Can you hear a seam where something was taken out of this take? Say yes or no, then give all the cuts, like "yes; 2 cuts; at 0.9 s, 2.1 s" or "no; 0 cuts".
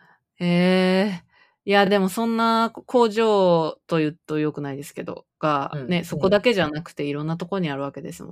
no; 0 cuts